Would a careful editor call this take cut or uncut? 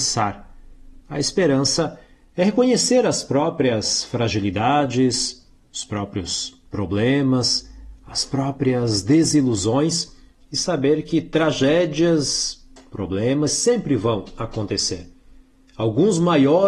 uncut